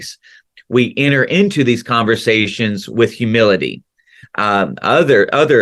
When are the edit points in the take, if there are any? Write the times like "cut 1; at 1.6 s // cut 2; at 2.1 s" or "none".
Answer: cut 1; at 4.2 s

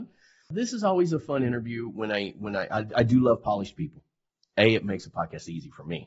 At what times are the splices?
none

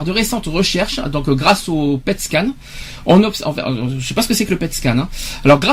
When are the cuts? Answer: none

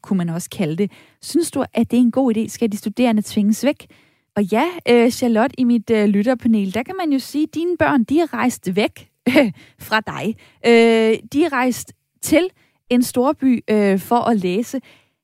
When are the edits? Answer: cut 1; at 4.3 s

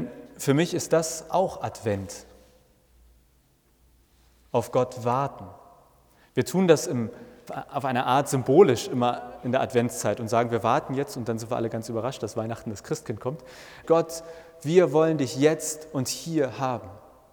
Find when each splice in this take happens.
cut 1; at 7.5 s // cut 2; at 13.8 s

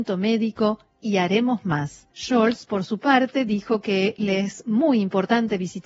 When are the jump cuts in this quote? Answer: cut 1; at 2.1 s

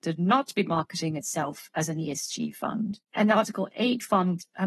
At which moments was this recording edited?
cut 1; at 3.0 s

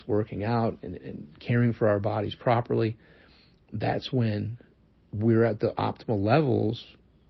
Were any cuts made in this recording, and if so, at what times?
cut 1; at 1.0 s

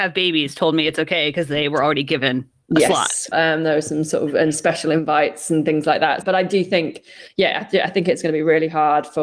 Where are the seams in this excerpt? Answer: cut 1; at 3.3 s // cut 2; at 6.2 s

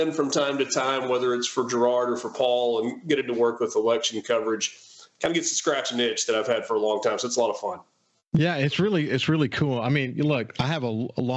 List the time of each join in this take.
none

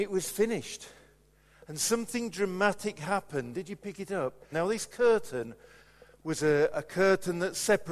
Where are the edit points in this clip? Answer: cut 1; at 4.5 s

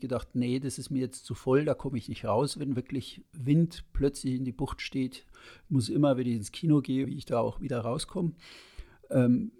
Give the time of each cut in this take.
cut 1; at 7.0 s

